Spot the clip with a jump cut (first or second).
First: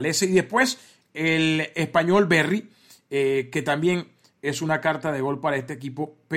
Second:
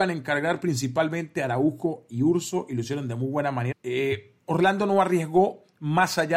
second